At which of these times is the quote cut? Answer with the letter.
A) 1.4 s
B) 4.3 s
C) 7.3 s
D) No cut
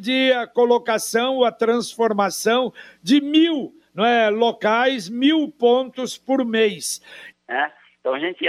C